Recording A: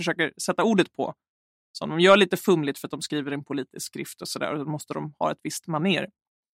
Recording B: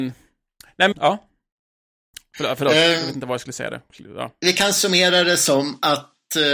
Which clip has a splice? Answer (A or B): B